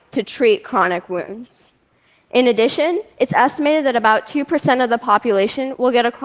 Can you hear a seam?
no; 0 cuts

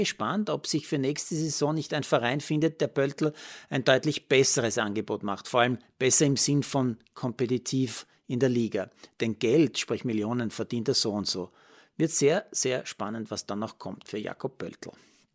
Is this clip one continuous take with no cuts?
yes; 0 cuts

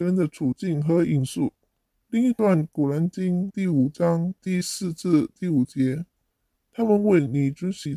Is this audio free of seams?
no; 1 cut; at 2.0 s

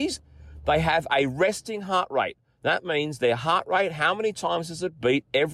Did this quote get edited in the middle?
no; 0 cuts

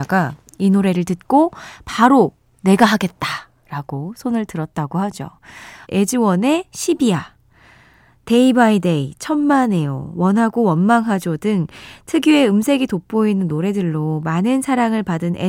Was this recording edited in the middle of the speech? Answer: yes; 1 cut; at 5.8 s

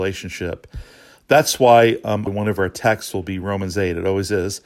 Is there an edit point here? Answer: yes; 1 cut; at 2.3 s

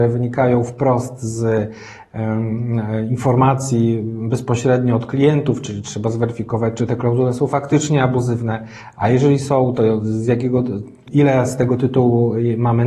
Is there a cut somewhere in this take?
yes; 1 cut; at 11.0 s

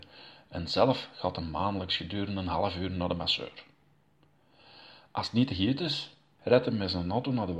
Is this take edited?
yes; 1 cut; at 6.4 s

